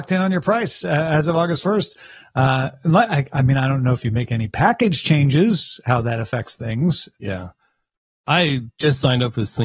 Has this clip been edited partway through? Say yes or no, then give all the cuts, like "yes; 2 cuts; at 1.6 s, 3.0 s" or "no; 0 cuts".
yes; 1 cut; at 7.1 s